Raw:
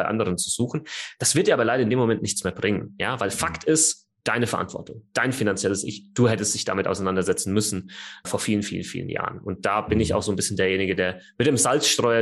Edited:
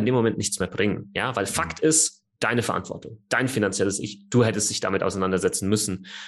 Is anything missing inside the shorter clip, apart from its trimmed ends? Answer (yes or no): no